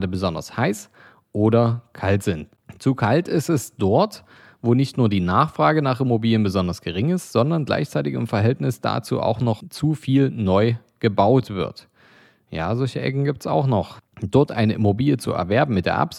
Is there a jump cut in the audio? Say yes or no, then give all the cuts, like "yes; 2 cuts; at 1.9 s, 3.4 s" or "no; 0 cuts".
no; 0 cuts